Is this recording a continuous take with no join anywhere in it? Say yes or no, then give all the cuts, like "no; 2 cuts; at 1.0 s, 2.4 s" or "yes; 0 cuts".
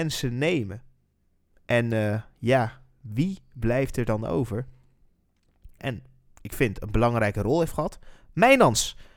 no; 1 cut; at 5.8 s